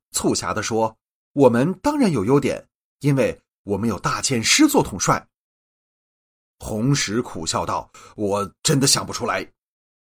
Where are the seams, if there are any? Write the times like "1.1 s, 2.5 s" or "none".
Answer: 2.8 s, 6.5 s

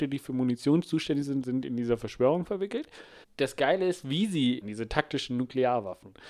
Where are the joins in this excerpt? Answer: 3.2 s, 4.6 s

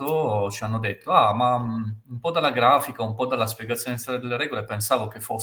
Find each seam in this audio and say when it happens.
none

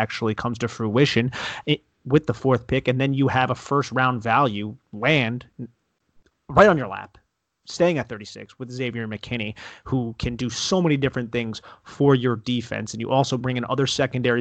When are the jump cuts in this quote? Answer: none

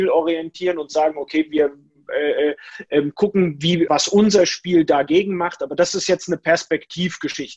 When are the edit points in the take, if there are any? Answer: 3.9 s

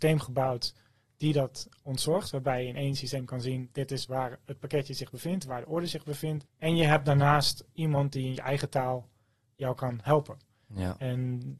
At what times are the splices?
6.4 s

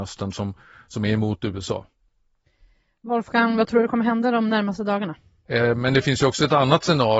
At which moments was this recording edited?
5.5 s

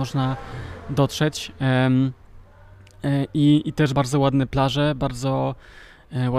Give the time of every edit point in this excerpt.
3.9 s

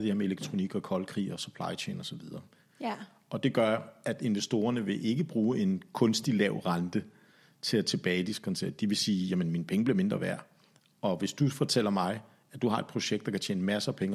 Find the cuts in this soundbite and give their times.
none

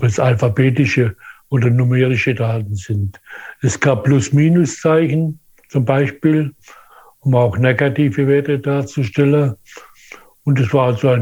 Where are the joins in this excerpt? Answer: none

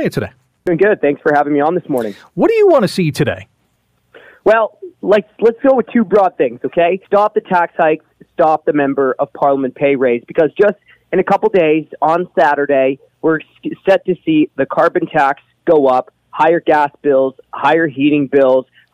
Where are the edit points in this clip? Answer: 7.0 s

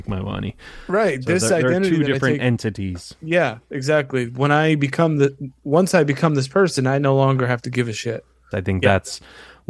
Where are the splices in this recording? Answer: 8.5 s

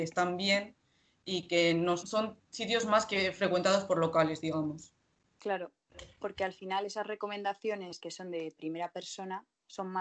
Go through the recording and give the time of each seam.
2.0 s

